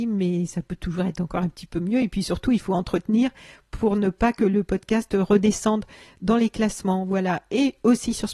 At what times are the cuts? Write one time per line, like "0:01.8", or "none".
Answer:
none